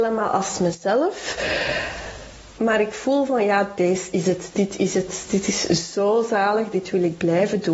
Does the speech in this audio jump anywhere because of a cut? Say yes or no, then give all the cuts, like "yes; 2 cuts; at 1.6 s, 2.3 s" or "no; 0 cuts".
yes; 1 cut; at 2.6 s